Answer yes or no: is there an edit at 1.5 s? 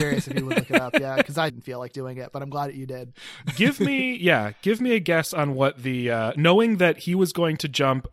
yes